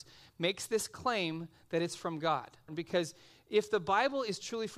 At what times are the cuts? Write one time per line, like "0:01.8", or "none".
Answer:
0:02.7